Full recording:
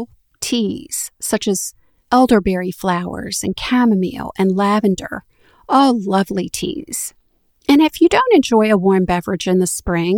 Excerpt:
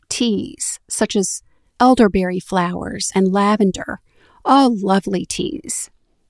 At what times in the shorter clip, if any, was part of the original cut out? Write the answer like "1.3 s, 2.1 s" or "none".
3.1 s

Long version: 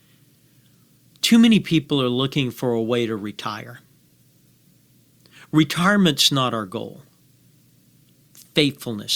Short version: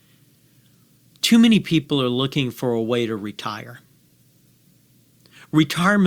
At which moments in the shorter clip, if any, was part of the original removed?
none

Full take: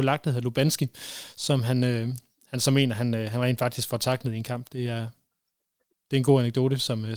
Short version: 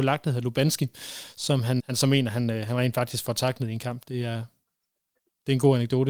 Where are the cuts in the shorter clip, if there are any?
1.8 s

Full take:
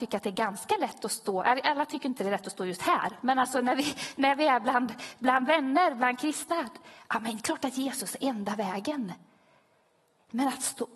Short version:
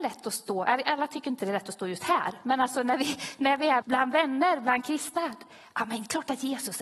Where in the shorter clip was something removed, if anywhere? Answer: 3.8 s

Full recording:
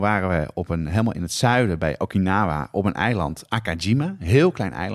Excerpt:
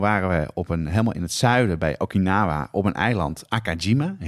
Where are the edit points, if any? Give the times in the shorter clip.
none

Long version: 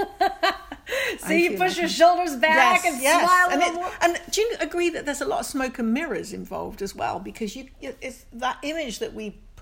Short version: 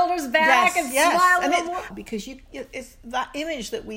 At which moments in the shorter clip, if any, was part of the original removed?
1.9 s

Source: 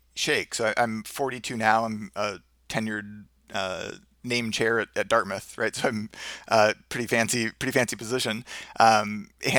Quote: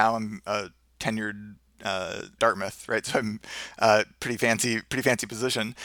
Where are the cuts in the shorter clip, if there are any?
2.4 s

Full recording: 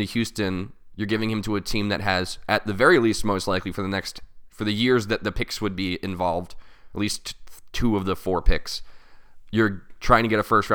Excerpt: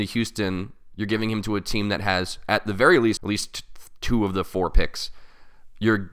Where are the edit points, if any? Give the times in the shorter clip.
3.2 s

